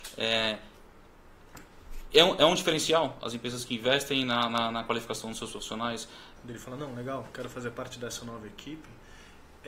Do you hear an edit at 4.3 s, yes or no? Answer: no